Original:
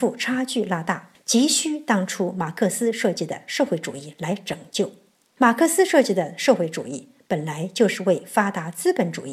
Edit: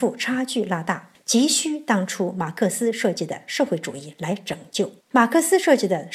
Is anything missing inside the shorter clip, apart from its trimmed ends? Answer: yes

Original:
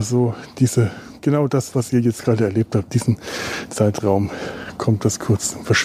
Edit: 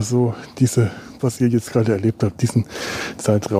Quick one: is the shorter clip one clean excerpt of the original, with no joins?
no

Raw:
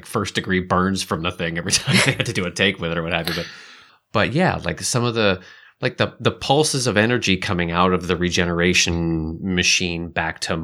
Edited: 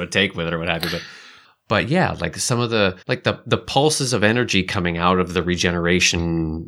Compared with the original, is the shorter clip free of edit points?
no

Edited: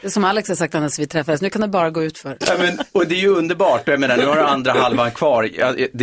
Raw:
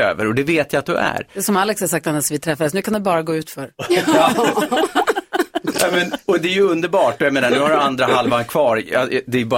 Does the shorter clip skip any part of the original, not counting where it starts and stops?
yes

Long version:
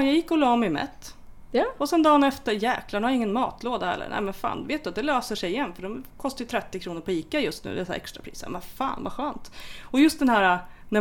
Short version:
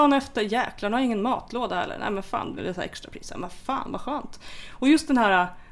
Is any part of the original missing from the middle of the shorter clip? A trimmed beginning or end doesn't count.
yes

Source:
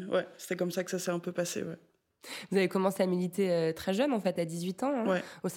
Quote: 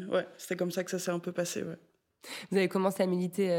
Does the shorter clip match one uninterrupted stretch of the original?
yes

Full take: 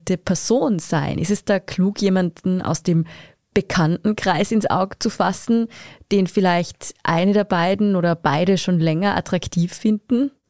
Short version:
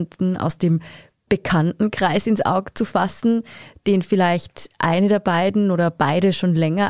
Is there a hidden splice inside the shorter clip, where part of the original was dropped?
no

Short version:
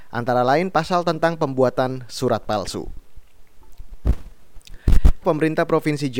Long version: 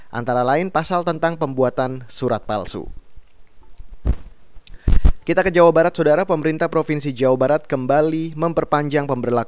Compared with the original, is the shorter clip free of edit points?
no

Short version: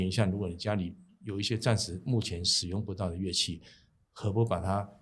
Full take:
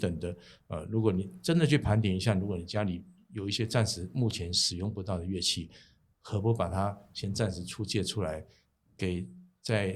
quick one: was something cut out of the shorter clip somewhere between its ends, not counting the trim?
no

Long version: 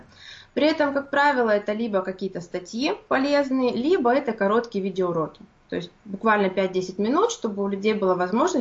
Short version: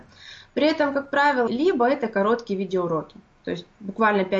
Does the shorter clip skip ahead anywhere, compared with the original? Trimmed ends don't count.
yes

